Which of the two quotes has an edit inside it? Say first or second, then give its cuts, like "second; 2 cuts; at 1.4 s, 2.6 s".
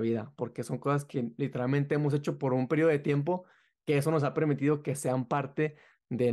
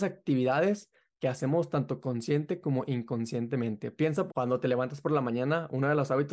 second; 1 cut; at 4.3 s